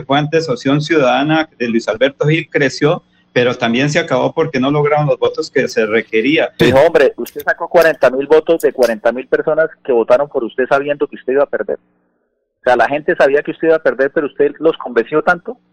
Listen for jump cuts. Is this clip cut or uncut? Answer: cut